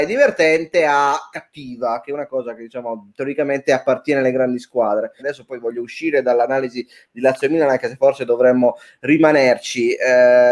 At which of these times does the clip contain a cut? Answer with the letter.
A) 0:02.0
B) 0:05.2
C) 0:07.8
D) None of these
B